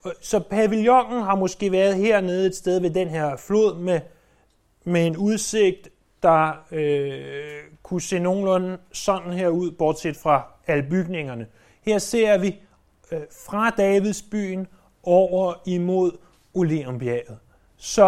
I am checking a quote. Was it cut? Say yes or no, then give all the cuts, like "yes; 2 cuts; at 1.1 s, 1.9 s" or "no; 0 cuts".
no; 0 cuts